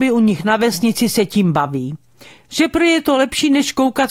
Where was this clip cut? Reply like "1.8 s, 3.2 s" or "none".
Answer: none